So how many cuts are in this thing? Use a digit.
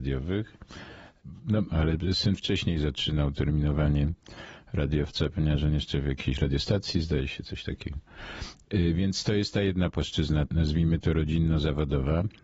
1